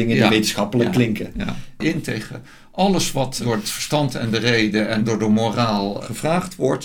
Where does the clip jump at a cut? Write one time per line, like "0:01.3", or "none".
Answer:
0:01.8